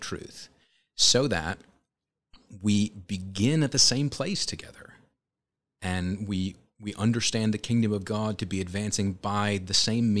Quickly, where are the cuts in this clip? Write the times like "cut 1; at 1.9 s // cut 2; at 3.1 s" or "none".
none